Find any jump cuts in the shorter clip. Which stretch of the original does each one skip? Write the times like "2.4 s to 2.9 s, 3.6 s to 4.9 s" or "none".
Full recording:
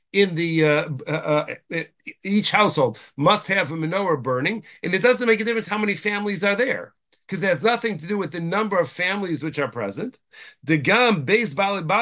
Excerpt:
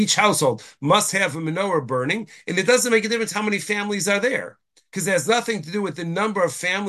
none

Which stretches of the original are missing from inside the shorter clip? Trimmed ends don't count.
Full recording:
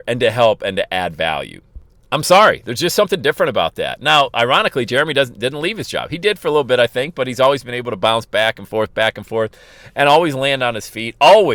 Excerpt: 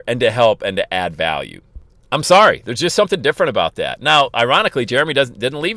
none

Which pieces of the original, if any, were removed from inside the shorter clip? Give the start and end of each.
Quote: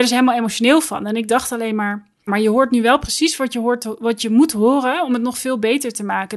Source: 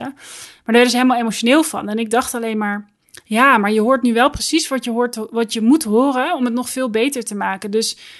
3.1 s to 3.6 s

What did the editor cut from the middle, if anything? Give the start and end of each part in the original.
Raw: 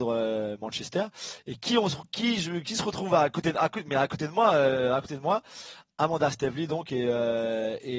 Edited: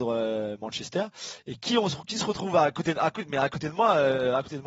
2.1 s to 2.6 s

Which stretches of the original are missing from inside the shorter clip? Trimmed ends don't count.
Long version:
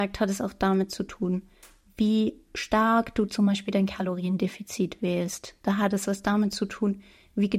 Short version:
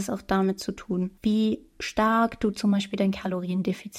1.5 s to 1.9 s

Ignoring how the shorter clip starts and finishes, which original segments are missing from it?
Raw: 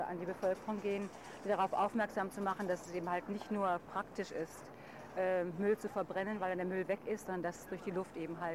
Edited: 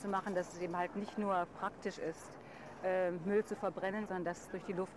6.4 s to 7.2 s

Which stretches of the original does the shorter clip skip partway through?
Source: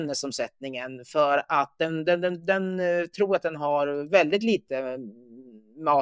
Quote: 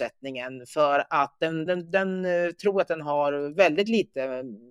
2.0 s to 2.2 s

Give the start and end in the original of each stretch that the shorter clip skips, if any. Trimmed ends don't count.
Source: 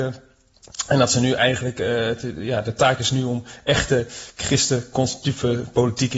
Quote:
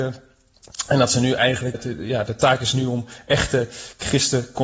1.7 s to 2.1 s

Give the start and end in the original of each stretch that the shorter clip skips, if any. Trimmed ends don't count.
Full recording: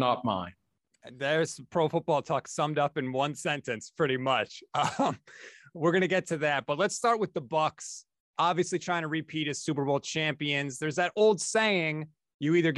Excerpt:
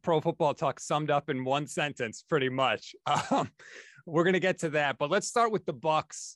none

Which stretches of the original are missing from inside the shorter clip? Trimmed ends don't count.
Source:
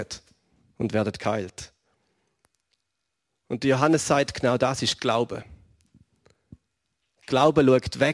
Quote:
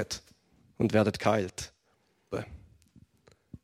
2.3 s to 5.3 s

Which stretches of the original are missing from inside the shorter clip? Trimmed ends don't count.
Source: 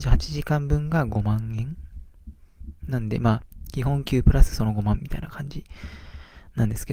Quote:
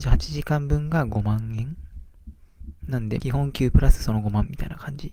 3.2 s to 3.7 s

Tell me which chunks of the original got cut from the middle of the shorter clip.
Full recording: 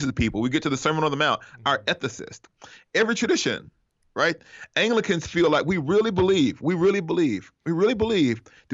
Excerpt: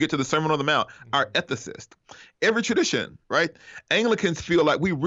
3.8 s to 4.1 s

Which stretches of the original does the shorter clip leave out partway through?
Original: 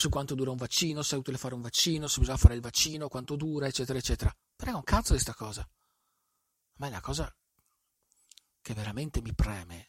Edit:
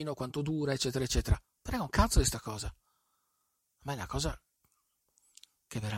none

